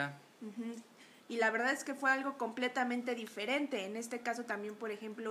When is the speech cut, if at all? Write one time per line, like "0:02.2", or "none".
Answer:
0:01.2